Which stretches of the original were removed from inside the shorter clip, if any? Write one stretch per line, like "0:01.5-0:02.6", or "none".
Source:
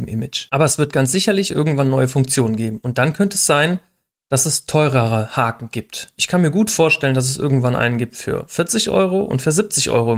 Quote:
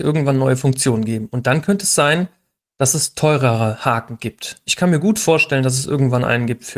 none